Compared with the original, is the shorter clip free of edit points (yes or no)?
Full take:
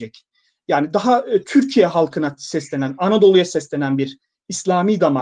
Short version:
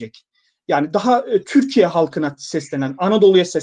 yes